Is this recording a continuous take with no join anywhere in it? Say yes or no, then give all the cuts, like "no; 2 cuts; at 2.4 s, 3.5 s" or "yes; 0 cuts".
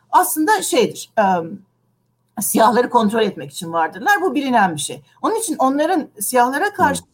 yes; 0 cuts